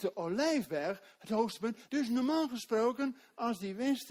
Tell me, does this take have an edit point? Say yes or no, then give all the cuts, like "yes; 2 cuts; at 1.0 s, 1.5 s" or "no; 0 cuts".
yes; 1 cut; at 1.9 s